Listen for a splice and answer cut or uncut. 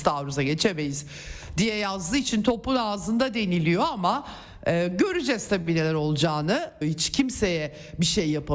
cut